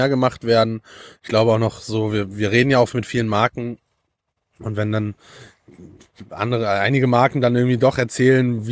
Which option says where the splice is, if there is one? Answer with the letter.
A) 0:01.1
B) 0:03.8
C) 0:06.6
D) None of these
D